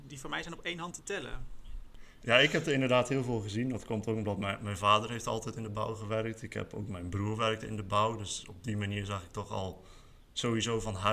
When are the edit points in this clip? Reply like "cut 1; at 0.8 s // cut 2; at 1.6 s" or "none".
none